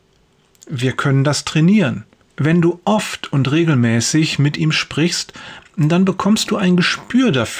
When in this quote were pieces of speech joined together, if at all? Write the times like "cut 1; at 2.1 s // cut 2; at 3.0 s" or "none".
cut 1; at 2.3 s

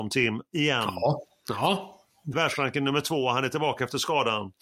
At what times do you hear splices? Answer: cut 1; at 2.3 s

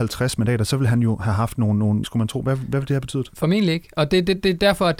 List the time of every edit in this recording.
cut 1; at 2.0 s

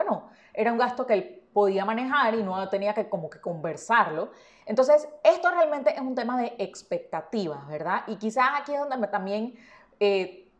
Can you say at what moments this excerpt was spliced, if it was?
cut 1; at 4.6 s

